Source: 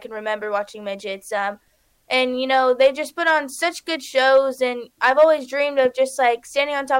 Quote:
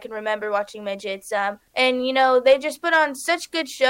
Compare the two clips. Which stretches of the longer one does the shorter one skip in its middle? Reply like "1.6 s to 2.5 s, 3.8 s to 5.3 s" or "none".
1.7 s to 2.0 s